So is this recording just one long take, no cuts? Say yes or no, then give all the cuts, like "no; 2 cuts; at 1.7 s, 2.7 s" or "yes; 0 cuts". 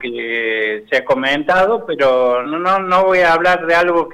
no; 1 cut; at 2.4 s